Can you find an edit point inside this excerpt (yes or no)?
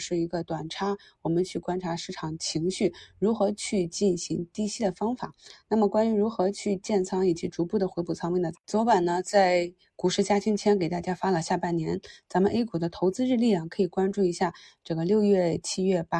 yes